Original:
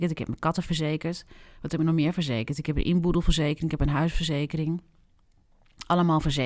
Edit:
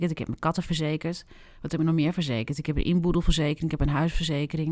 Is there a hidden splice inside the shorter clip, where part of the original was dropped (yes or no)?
no